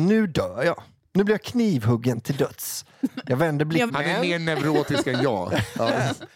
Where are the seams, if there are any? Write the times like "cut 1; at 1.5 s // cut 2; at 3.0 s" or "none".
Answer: cut 1; at 3.9 s